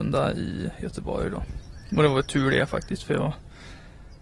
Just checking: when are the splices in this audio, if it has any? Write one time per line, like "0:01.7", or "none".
none